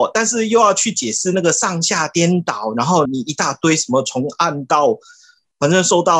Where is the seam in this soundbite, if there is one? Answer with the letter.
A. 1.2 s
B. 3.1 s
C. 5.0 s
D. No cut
B